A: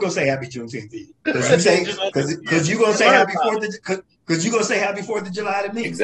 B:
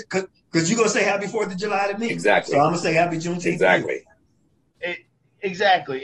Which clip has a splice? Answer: A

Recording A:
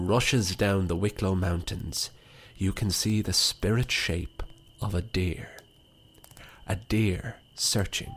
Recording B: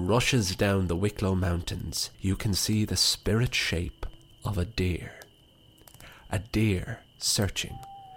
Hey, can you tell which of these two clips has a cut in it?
B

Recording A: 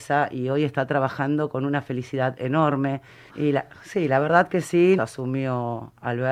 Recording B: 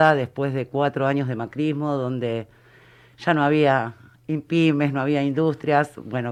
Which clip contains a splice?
A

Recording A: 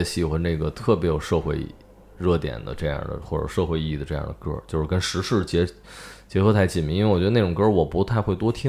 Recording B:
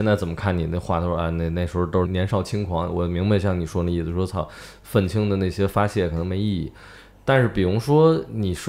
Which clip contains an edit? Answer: B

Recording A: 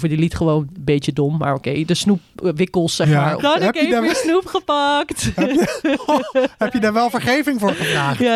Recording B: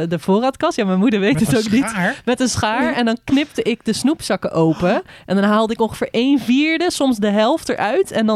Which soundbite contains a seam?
A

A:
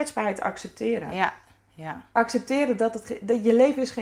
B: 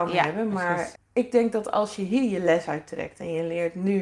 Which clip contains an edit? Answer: B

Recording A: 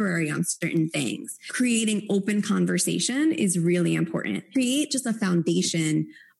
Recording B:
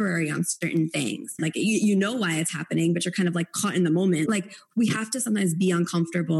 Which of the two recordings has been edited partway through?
B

